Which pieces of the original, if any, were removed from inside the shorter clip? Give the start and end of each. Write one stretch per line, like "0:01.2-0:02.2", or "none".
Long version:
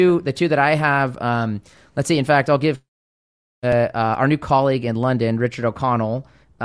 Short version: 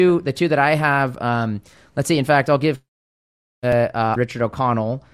0:04.2-0:05.4

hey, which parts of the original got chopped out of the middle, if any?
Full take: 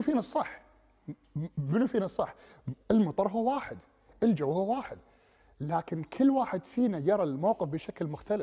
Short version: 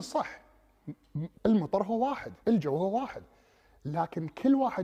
0:01.5-0:02.8
0:03.9-0:04.2

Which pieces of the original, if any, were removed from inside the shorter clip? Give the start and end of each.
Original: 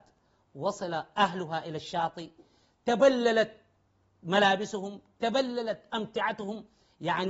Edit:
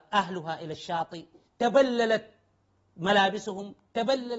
0:02.5-0:02.7

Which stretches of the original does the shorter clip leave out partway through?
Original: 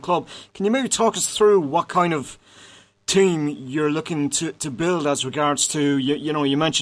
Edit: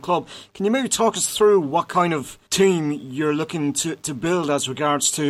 0:02.5-0:03.0

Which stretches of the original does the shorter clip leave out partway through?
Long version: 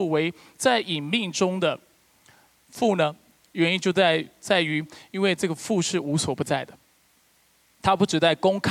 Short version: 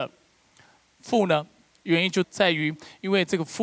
0:03.9-0:04.3

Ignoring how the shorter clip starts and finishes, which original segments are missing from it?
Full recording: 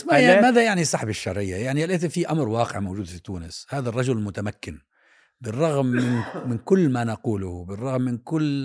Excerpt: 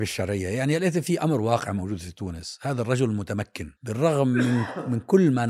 0:04.8-0:05.3

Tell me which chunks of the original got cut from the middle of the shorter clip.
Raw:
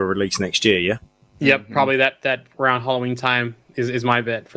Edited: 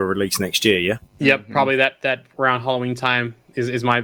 0:01.1-0:01.3

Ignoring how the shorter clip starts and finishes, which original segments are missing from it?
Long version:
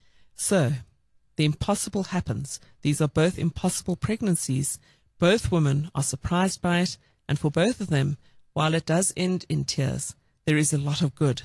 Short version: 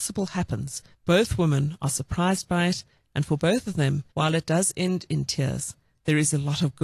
0:02.7-0:05.1
0:08.2-0:08.5

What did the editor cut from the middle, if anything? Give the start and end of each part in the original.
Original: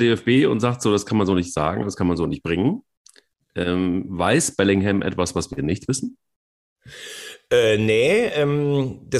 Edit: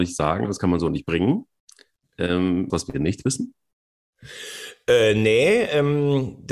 0:04.1-0:05.3

